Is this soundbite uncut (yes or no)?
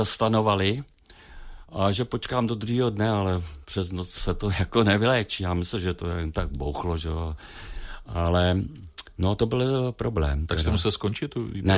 yes